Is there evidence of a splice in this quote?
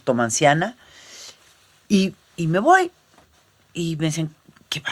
no; 0 cuts

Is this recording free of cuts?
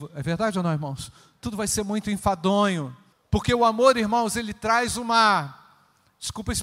no; 1 cut; at 3.1 s

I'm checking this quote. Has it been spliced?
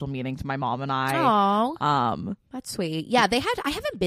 no; 0 cuts

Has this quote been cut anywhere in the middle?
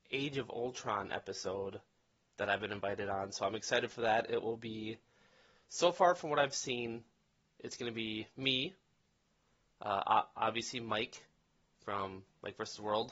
no; 0 cuts

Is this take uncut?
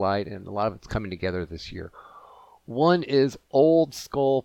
yes; 0 cuts

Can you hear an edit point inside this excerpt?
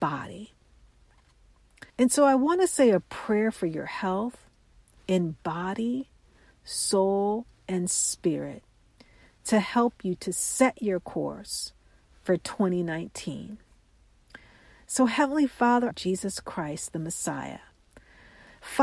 yes; 2 cuts; at 1.9 s, 15.9 s

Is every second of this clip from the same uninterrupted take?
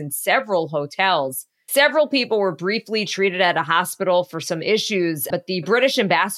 no; 1 cut; at 5.3 s

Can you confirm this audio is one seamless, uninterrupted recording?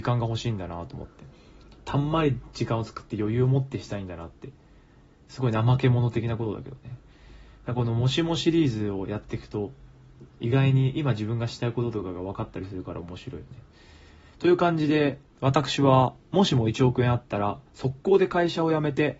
yes; 0 cuts

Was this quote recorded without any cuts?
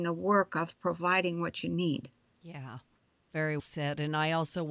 no; 1 cut; at 3.6 s

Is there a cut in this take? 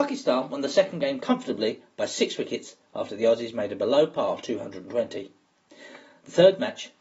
no; 0 cuts

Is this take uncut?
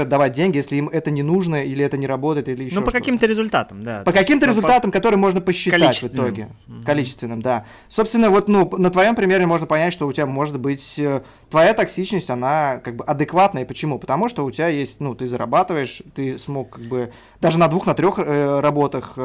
yes; 0 cuts

